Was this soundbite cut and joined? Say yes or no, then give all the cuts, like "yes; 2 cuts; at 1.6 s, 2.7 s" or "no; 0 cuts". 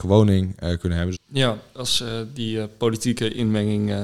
yes; 1 cut; at 1.1 s